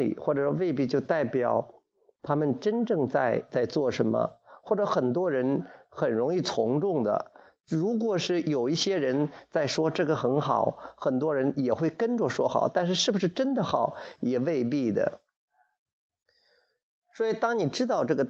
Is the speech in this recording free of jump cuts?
yes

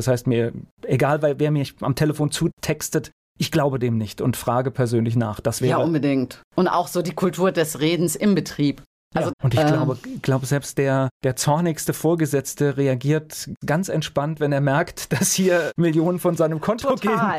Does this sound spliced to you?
yes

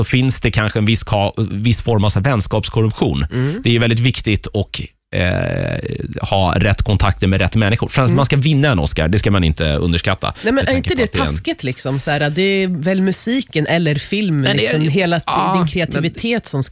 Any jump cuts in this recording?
no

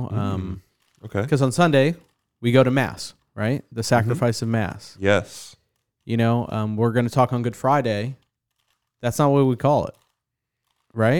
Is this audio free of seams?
yes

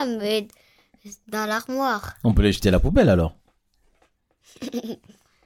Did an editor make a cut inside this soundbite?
no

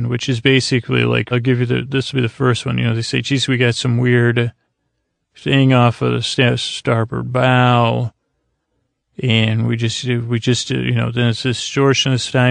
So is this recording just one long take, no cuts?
no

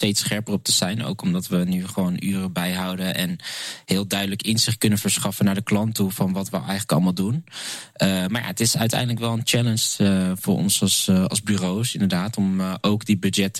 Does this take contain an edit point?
no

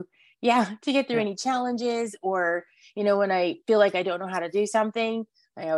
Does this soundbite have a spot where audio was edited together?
no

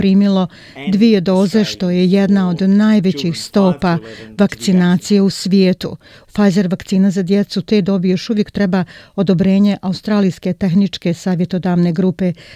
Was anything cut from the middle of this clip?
yes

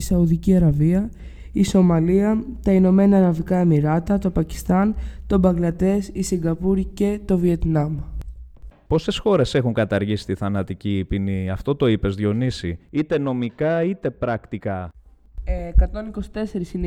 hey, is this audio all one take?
no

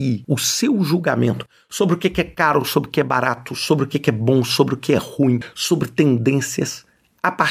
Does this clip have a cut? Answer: no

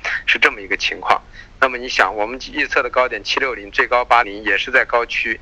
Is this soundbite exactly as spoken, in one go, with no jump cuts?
no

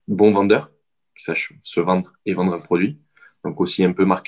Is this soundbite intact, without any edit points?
yes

